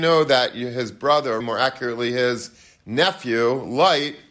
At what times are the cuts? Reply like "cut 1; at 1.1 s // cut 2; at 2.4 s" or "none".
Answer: cut 1; at 1.4 s